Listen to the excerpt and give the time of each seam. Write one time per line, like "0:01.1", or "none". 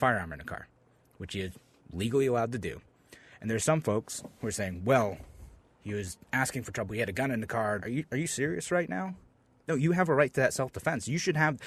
0:07.8

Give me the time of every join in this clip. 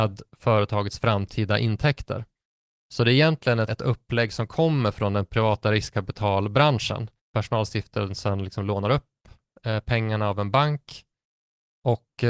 0:03.7
0:07.2

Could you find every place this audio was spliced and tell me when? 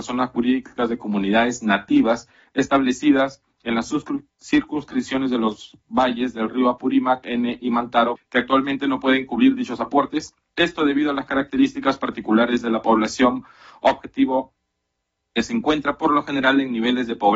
0:08.2

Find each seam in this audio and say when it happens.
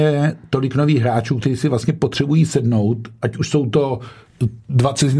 none

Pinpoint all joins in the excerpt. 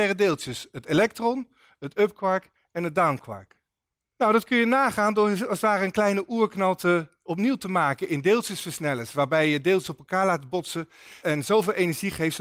0:04.0
0:11.2

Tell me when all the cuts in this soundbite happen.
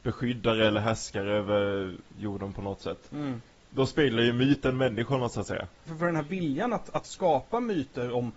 0:05.9

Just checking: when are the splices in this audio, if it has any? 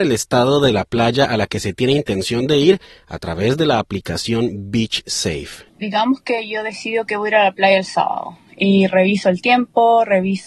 0:05.7

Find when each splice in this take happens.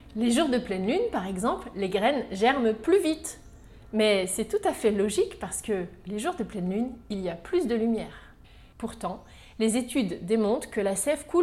0:08.7

